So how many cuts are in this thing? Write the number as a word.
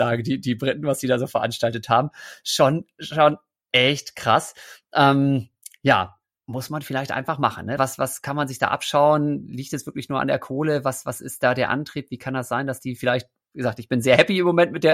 one